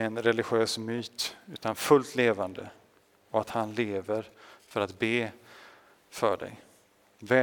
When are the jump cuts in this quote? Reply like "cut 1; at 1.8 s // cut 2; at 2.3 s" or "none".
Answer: none